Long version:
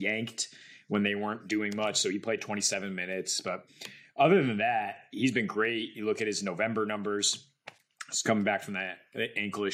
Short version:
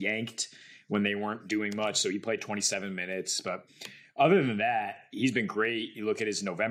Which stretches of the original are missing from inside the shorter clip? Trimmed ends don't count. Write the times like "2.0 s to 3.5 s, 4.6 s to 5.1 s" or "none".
none

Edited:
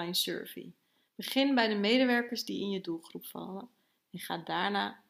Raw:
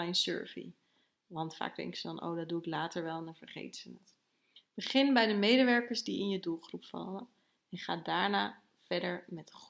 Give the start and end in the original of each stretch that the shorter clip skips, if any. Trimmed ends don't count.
1.1 s to 4.7 s

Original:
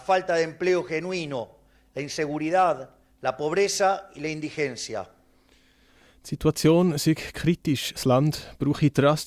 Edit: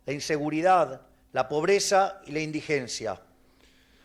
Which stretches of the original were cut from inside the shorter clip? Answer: none

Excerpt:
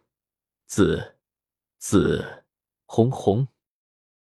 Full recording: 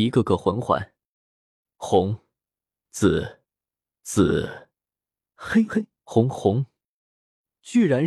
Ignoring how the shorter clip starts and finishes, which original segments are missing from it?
5.0 s to 6.0 s

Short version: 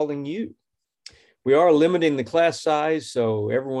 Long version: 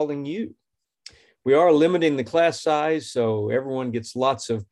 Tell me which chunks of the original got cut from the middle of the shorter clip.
none

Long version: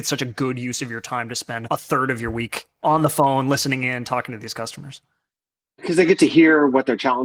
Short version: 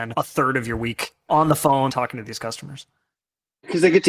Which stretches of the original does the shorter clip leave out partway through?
3.4 s to 4.0 s

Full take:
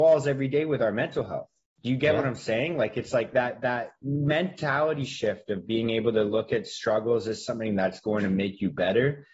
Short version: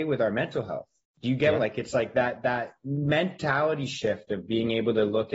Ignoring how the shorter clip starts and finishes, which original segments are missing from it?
2.2 s to 2.7 s

